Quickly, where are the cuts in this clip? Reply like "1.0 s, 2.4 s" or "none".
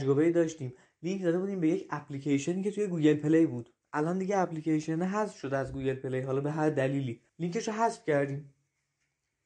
7.3 s